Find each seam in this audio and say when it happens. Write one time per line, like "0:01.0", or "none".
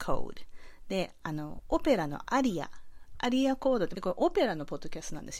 0:03.9